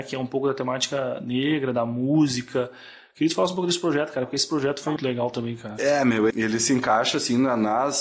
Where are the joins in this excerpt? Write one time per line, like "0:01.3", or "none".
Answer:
0:05.0
0:06.3